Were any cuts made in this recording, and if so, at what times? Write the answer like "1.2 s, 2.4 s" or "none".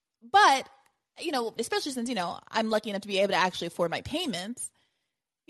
1.6 s